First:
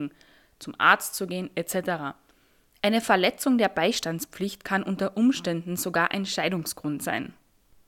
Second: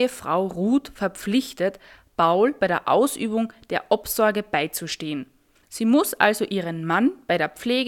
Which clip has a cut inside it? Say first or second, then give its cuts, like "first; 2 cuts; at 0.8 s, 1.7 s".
second; 1 cut; at 5.5 s